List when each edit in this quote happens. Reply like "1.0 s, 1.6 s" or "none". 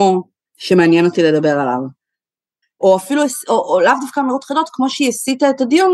2.6 s